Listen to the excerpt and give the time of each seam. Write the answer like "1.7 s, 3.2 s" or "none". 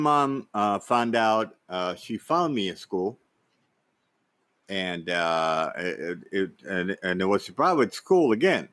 none

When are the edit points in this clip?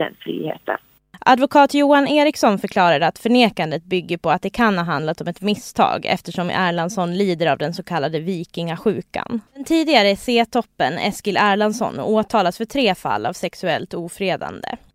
9.5 s

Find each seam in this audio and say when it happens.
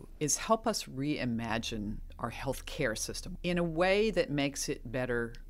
3.4 s

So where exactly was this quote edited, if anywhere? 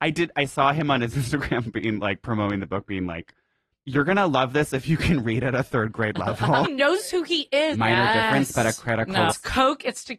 6.6 s, 7.7 s, 9.3 s

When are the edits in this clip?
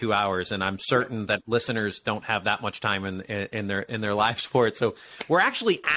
none

